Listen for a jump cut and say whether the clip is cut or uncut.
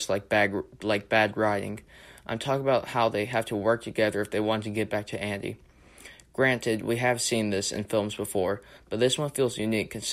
uncut